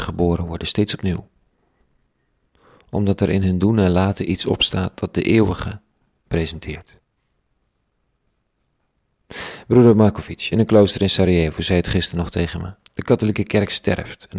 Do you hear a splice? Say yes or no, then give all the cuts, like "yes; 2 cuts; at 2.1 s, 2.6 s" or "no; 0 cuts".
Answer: no; 0 cuts